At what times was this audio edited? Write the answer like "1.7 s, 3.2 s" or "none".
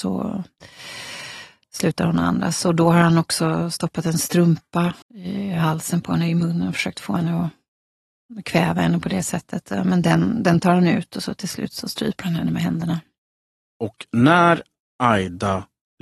5.0 s